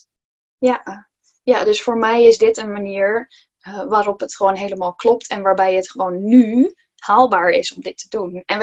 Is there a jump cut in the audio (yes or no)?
no